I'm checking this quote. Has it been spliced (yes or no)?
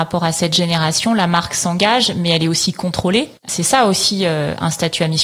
yes